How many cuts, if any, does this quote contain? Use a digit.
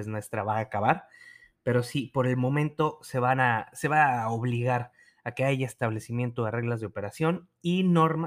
0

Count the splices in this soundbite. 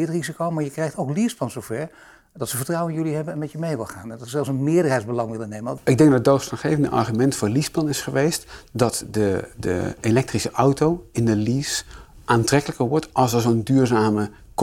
1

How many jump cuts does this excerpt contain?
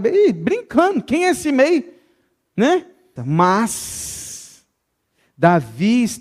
1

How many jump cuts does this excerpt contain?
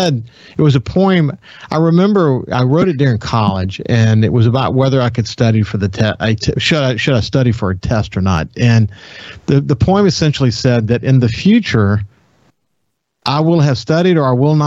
0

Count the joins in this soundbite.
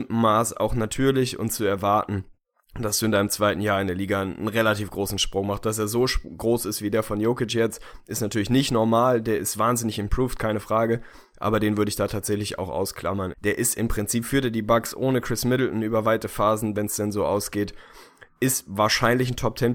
2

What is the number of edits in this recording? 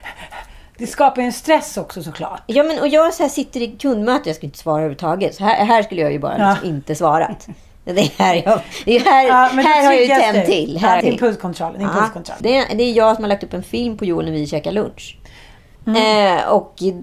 3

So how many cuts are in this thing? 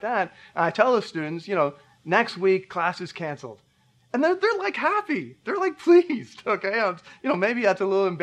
0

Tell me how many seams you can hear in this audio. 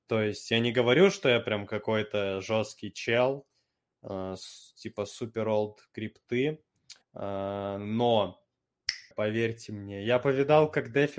2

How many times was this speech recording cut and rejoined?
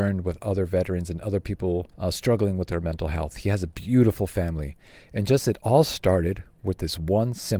1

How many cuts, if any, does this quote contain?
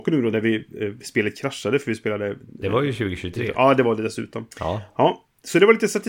1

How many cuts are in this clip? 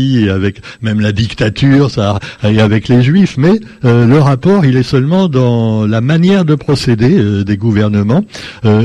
0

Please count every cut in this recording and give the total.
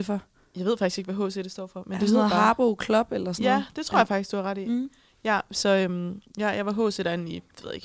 0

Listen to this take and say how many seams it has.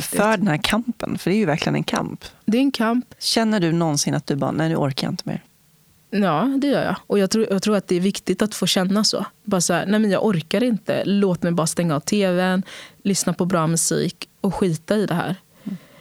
0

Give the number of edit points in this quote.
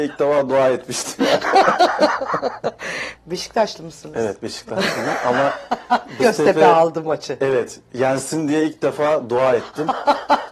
2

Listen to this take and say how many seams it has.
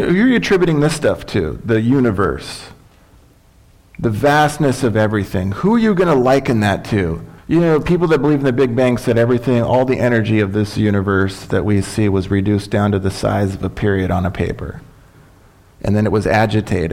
1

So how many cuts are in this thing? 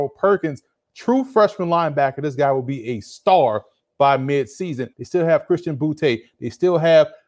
1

